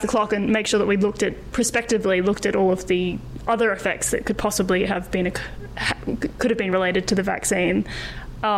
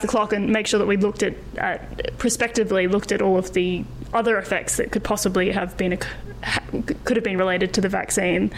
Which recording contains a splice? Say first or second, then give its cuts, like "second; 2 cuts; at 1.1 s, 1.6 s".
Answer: first; 1 cut; at 1.5 s